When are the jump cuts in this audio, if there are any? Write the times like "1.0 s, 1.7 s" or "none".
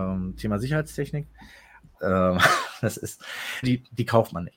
1.9 s, 3.6 s

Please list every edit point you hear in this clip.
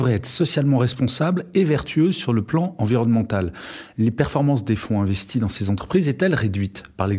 none

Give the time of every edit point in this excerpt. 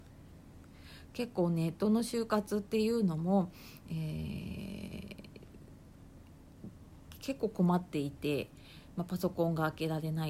none

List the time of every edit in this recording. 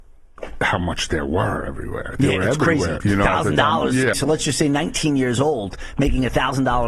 3.0 s, 4.1 s

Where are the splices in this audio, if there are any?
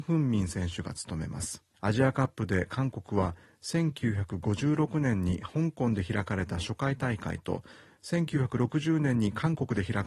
1.7 s

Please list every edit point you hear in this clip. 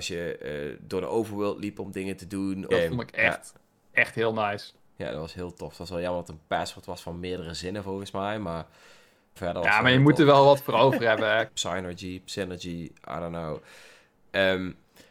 2.7 s, 9.4 s, 11.5 s

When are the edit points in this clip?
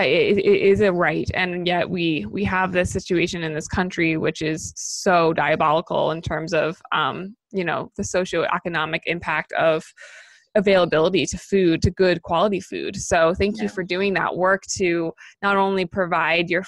none

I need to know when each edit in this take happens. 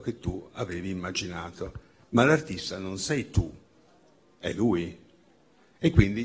none

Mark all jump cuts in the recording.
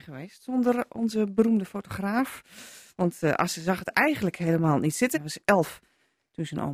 5.1 s

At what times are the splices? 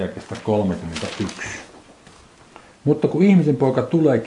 none

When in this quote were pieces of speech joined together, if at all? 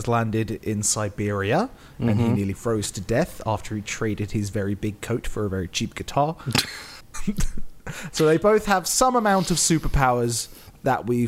7.1 s

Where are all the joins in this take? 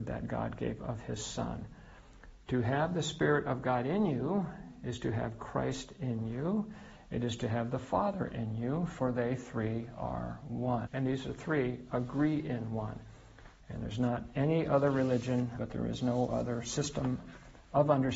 10.9 s, 13.6 s, 15.6 s

